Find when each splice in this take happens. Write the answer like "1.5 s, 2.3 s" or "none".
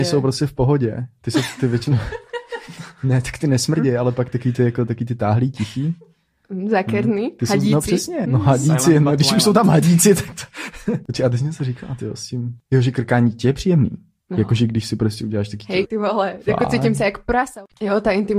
8.2 s, 15.8 s